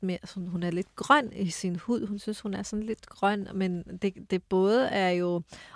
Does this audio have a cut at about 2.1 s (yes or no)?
no